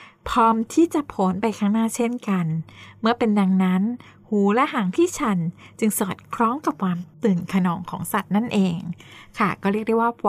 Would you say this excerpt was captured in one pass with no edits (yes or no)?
yes